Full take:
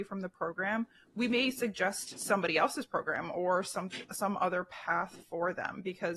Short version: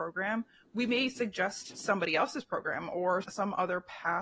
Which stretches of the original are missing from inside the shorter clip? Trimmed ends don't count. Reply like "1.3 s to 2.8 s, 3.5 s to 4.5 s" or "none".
3.6 s to 4.1 s